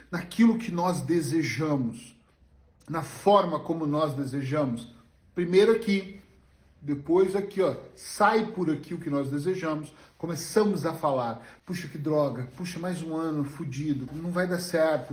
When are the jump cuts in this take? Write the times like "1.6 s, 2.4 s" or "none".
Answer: 11.6 s, 14.1 s